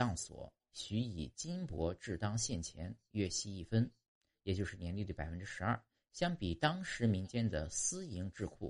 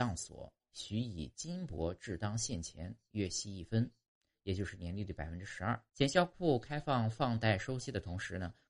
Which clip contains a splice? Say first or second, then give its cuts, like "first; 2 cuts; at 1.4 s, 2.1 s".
second; 1 cut; at 5.9 s